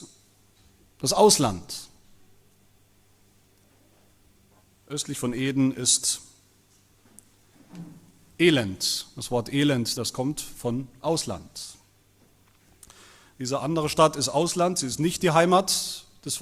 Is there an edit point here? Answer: yes; 1 cut; at 10.0 s

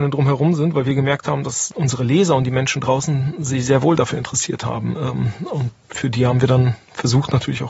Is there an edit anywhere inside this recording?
no; 0 cuts

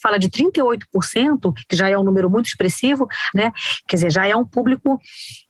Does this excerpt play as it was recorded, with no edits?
no; 1 cut; at 3.3 s

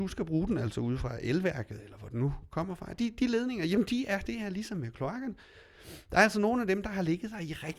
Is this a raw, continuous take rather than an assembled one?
yes; 0 cuts

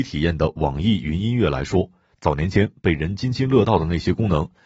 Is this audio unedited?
yes; 0 cuts

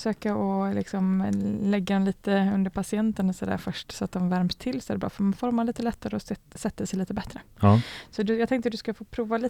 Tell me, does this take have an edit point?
no; 0 cuts

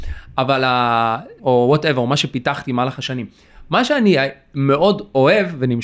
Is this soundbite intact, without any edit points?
no; 1 cut; at 1.4 s

